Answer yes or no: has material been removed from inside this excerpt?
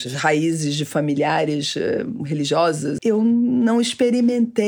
yes